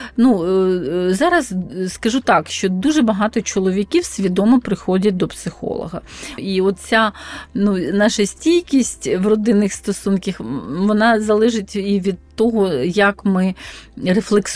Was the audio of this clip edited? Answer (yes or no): yes